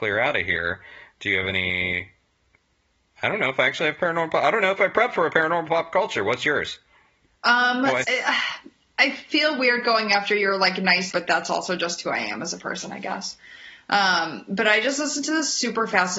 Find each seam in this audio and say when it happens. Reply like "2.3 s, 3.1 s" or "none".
8.0 s, 11.1 s

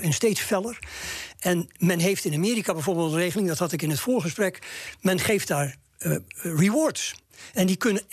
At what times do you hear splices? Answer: 1.4 s

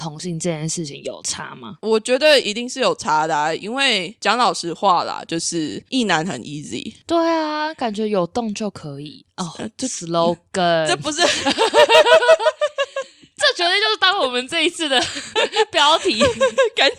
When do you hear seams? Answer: none

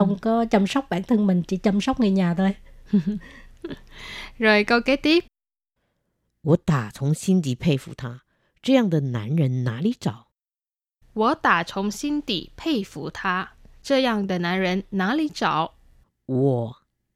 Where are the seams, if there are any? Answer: 16.0 s

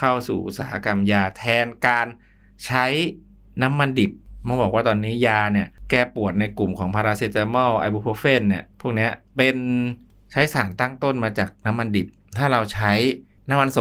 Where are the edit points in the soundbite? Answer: none

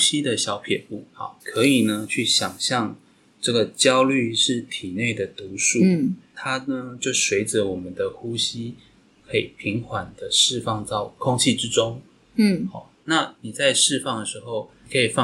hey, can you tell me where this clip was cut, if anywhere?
1.4 s

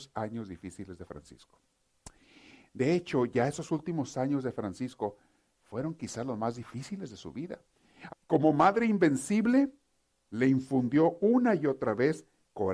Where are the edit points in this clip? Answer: 8.1 s

